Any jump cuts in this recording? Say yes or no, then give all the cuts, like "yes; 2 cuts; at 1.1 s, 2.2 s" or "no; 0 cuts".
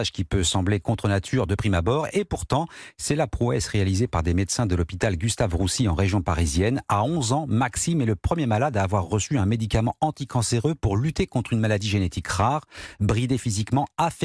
no; 0 cuts